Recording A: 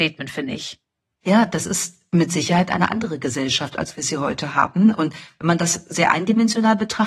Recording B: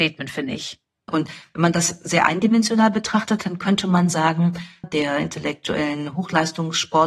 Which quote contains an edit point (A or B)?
B